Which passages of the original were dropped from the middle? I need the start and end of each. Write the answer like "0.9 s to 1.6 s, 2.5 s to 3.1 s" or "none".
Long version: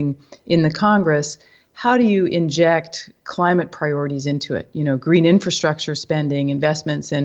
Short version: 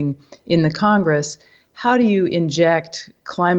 none